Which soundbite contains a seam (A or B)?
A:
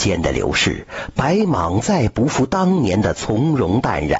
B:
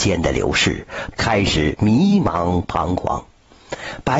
B